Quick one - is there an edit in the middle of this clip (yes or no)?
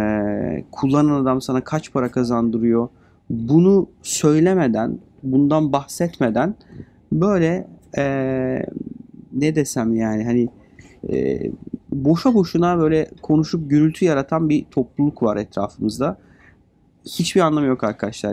no